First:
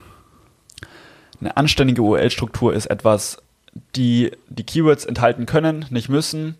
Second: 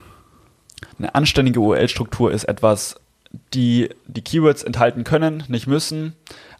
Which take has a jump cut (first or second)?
second